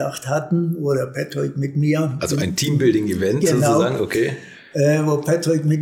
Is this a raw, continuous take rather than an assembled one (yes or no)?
yes